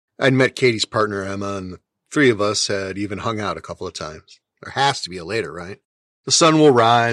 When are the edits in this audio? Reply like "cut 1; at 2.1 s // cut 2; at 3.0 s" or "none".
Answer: cut 1; at 4.4 s